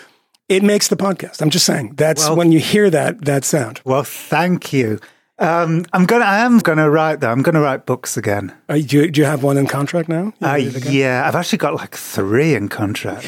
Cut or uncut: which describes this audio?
cut